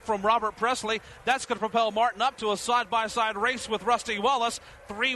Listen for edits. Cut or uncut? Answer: uncut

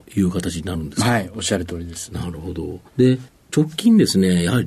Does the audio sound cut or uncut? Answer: cut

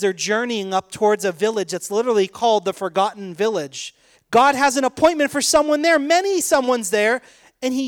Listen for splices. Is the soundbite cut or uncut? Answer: cut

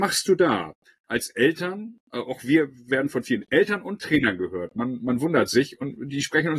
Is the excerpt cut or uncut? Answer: uncut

